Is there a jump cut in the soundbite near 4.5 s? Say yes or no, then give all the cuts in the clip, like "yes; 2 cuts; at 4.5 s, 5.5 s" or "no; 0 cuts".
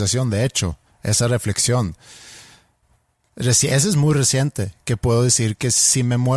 no; 1 cut; at 3.3 s